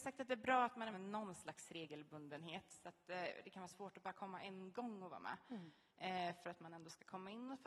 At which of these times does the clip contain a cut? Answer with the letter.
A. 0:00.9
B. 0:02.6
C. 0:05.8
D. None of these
A